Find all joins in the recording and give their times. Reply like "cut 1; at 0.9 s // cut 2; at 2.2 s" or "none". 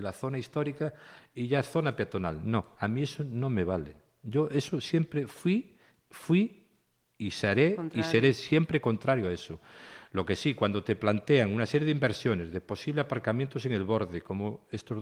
none